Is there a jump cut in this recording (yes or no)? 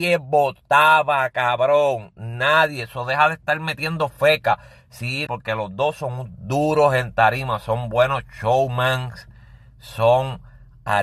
yes